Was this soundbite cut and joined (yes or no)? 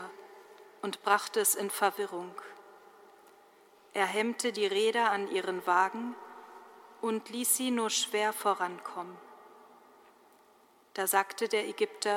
no